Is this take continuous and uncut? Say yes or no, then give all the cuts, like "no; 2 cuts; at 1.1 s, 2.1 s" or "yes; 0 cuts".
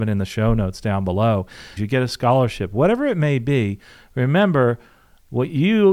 no; 1 cut; at 1.8 s